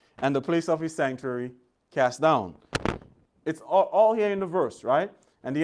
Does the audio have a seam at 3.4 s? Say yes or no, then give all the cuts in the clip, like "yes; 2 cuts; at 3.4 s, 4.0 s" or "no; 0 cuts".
yes; 1 cut; at 3.4 s